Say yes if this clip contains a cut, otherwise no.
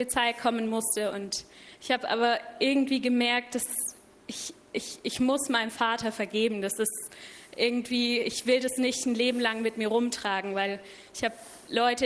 yes